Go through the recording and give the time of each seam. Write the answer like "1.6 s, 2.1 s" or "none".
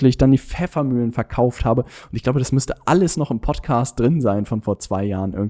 none